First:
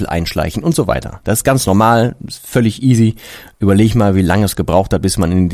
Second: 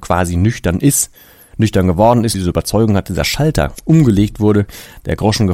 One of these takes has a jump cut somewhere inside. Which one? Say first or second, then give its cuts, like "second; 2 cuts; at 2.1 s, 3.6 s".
second; 1 cut; at 2.3 s